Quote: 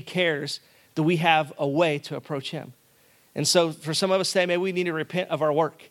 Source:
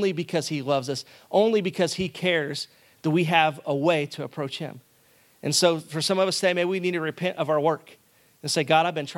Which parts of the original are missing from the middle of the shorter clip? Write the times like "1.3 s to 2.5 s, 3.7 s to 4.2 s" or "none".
none